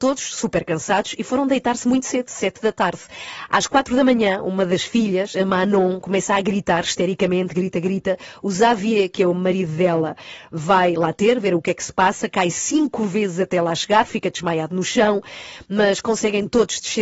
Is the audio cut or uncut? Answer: cut